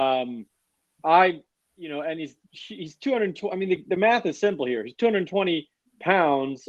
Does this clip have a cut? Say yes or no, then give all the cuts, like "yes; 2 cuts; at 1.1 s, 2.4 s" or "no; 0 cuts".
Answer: no; 0 cuts